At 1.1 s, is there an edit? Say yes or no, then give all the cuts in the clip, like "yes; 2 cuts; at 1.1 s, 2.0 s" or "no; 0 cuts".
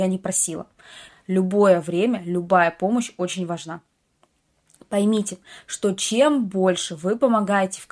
yes; 1 cut; at 1.1 s